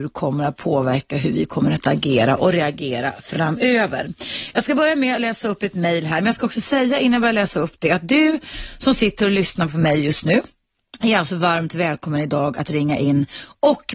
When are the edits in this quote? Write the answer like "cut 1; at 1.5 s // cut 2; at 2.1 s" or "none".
none